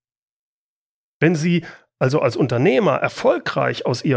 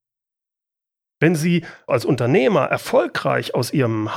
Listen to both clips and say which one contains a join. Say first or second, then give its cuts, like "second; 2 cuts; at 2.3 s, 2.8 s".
second; 1 cut; at 1.9 s